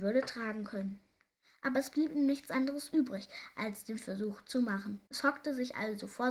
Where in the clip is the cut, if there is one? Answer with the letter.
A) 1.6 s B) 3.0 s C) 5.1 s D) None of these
C